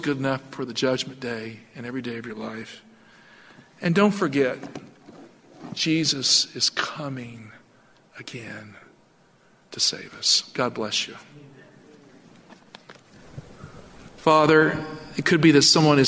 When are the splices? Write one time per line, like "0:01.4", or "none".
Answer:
none